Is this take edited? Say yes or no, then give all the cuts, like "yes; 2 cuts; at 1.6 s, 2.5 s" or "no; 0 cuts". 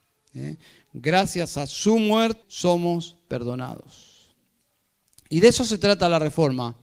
yes; 1 cut; at 2.4 s